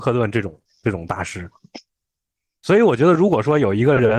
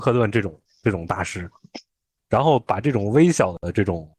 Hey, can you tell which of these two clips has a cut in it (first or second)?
second